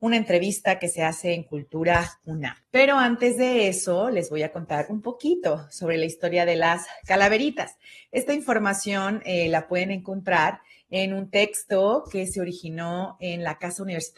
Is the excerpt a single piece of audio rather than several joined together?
no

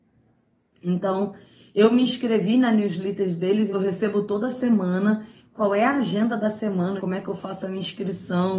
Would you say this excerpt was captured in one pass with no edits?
no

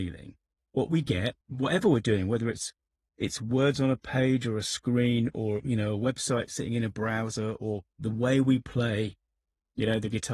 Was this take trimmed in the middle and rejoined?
yes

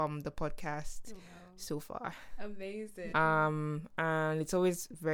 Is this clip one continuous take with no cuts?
no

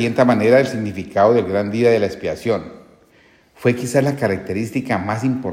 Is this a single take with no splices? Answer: yes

